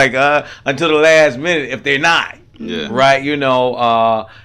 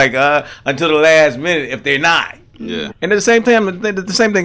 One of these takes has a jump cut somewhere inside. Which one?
second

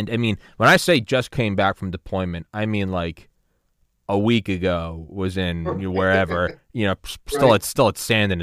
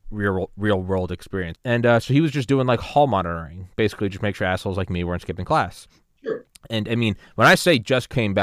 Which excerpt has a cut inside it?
second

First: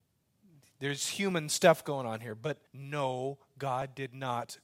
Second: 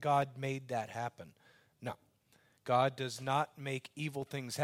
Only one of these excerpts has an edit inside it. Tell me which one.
first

